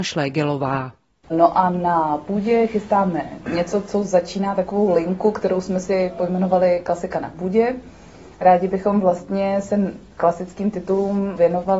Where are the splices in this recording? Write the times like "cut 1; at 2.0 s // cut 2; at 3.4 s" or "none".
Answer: none